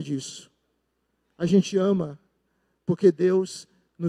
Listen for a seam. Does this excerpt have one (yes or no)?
no